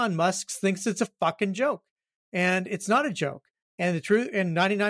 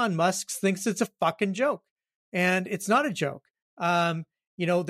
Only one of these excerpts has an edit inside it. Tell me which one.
first; 1 cut; at 3.7 s

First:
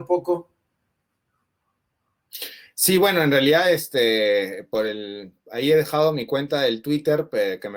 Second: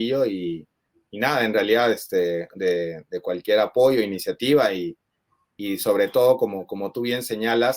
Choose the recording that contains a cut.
second; 1 cut; at 2.5 s

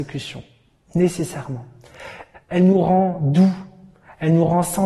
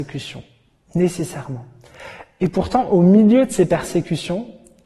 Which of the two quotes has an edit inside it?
first; 1 cut; at 2.3 s

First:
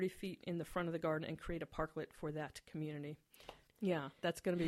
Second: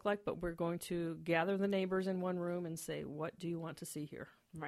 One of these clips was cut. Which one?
first; 1 cut; at 3.7 s

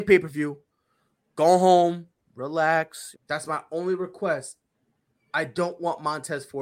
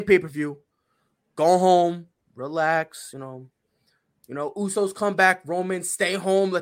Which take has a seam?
first; 1 cut; at 3.1 s

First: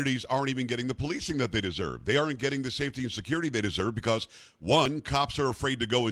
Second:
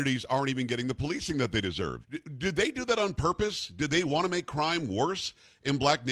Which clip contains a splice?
second; 1 cut; at 2.0 s

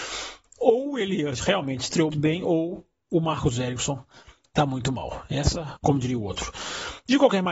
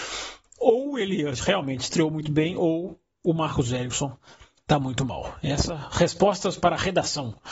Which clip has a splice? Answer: first; 2 cuts; at 2.1 s, 5.8 s

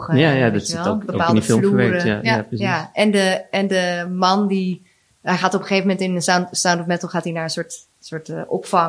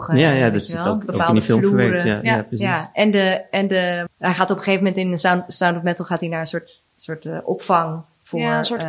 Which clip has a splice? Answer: second; 1 cut; at 4.1 s

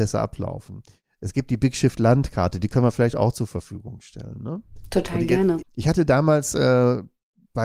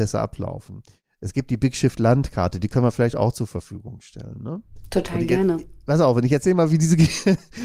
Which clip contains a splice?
first; 1 cut; at 5.6 s

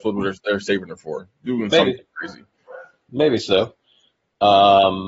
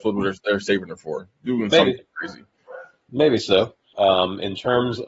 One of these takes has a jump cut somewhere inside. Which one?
second; 1 cut; at 3.9 s

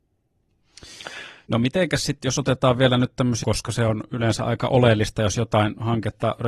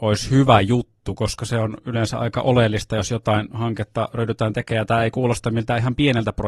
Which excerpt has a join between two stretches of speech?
first; 2 cuts; at 1.4 s, 3.4 s

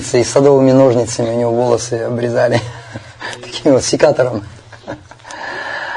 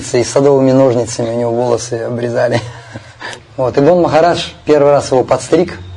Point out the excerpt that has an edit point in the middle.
second; 1 cut; at 3.4 s

